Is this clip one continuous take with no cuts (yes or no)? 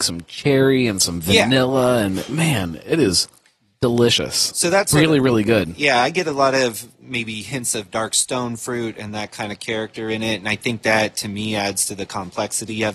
yes